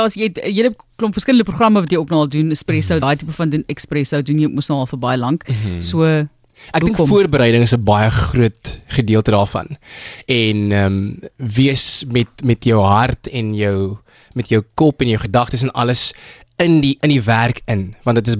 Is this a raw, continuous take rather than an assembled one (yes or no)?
yes